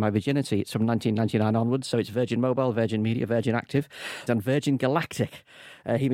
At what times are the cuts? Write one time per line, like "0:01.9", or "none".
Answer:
0:04.3